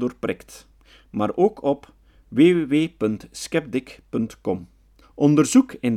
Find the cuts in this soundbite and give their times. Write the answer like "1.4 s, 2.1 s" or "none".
5.0 s

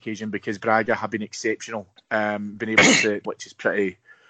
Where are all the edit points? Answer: 2.0 s, 3.3 s

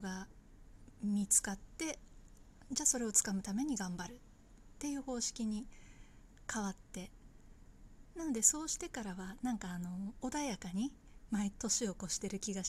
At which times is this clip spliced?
11.5 s

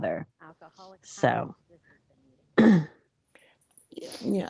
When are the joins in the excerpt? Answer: 0.9 s

